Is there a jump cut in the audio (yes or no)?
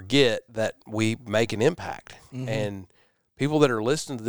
no